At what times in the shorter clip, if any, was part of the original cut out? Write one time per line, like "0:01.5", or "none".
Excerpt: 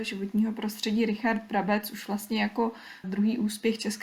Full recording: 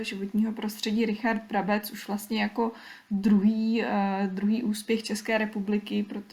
0:03.0